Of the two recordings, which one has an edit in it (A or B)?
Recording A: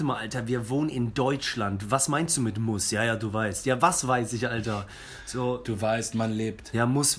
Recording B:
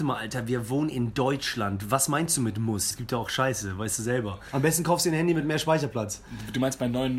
B